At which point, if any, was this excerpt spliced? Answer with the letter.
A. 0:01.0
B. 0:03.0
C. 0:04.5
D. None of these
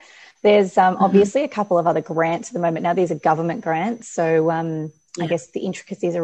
B